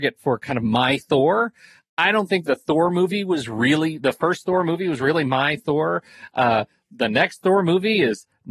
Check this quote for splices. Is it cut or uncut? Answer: uncut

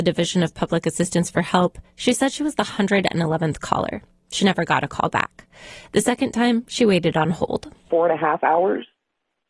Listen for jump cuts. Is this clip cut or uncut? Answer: uncut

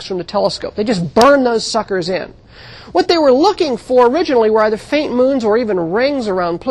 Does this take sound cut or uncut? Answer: uncut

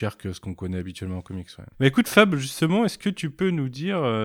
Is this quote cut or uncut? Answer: cut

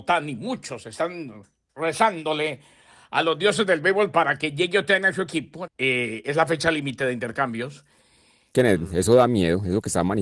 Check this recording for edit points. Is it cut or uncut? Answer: cut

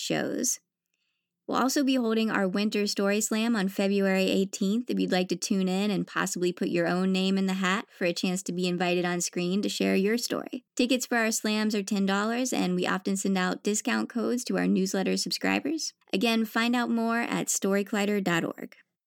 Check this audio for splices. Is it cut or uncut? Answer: cut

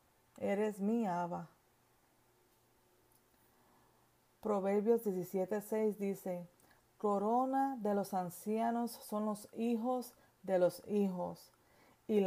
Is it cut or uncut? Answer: uncut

